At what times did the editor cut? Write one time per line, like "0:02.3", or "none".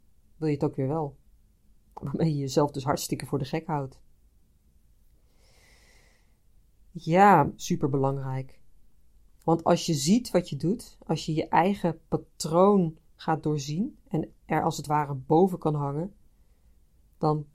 0:07.6